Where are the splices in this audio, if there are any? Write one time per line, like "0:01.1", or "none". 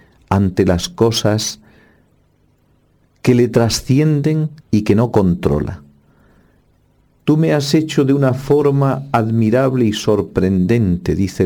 0:04.6